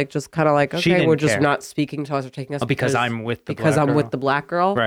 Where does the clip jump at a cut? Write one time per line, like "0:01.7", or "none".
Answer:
0:01.4

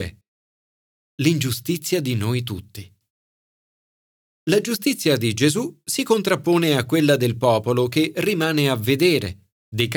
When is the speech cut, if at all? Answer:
none

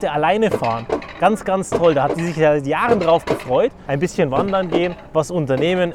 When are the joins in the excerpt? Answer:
0:03.9

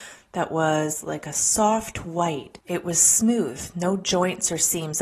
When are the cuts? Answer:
0:02.6

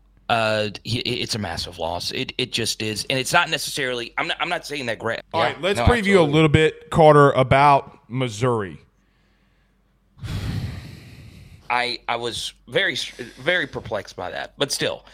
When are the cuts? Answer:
0:05.2
0:11.6

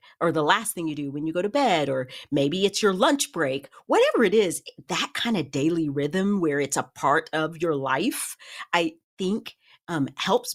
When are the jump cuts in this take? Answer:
none

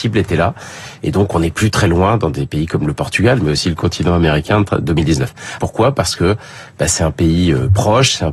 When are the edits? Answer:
0:05.6

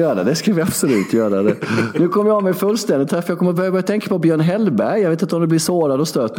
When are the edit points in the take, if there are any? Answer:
none

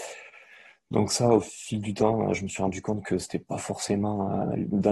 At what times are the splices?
none

